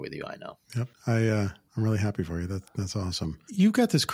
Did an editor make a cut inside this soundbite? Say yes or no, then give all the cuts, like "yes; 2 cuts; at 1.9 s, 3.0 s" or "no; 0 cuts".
yes; 1 cut; at 0.9 s